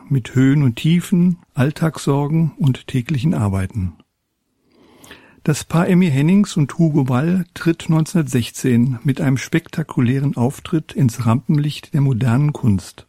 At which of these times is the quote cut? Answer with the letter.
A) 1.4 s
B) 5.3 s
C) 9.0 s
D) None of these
A